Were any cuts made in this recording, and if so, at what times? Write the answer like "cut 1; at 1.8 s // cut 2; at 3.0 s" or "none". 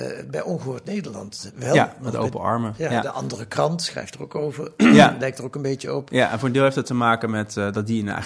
cut 1; at 1.5 s